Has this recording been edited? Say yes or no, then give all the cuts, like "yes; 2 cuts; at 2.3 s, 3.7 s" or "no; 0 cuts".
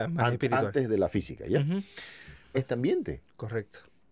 yes; 1 cut; at 2.5 s